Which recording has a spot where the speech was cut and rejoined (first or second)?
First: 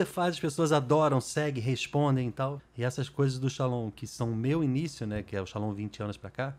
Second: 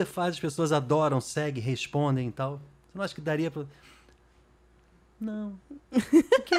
first